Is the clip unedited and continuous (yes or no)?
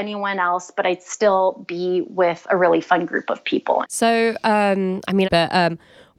no